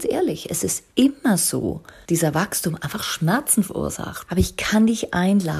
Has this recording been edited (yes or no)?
yes